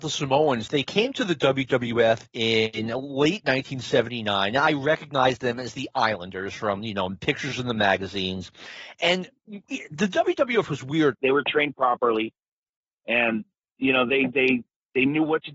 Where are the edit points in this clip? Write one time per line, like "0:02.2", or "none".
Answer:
0:11.1